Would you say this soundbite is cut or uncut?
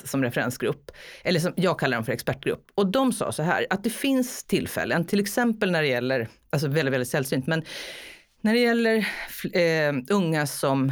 uncut